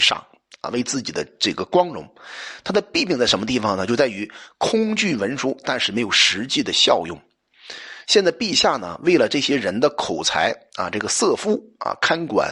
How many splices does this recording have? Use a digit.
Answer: 1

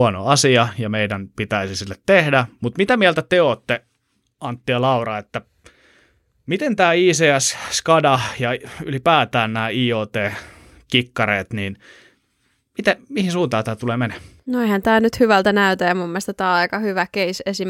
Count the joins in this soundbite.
1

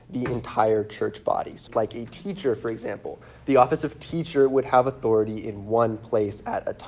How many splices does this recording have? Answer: 1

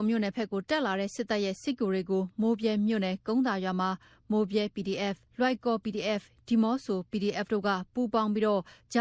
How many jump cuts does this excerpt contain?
1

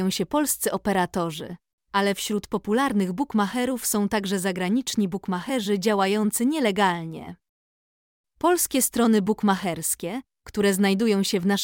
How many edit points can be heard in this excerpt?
0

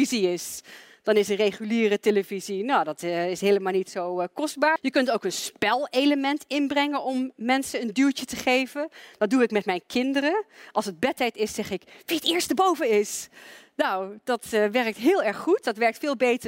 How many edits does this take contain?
1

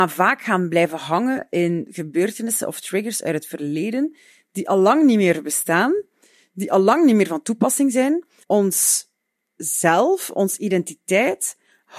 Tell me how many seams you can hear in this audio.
1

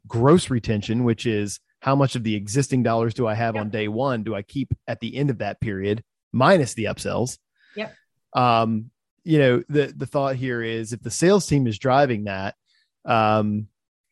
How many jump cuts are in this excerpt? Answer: 1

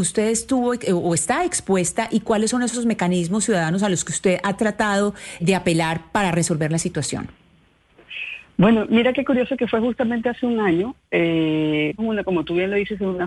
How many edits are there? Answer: 2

